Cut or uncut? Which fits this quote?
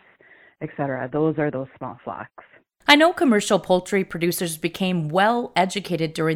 uncut